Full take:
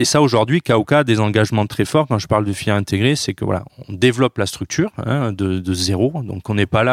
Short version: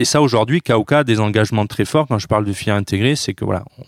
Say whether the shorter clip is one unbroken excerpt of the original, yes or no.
yes